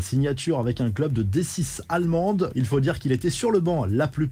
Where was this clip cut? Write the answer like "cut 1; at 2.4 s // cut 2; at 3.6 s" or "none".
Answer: cut 1; at 2.5 s